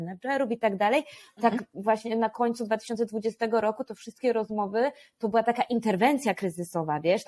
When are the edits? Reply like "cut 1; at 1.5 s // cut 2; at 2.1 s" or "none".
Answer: none